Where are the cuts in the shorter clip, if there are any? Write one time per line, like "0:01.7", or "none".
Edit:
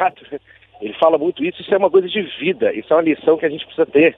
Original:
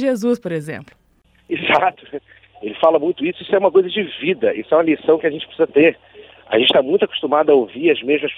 none